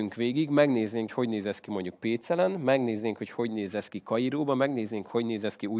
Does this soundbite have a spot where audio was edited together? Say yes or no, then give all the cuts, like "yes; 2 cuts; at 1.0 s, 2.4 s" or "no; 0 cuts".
yes; 1 cut; at 1.1 s